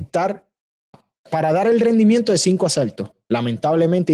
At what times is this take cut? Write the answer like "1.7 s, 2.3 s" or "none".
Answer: 0.9 s